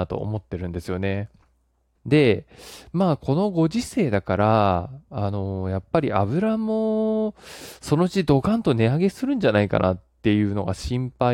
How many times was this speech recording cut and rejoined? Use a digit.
1